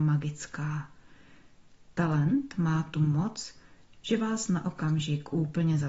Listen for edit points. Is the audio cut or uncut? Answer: uncut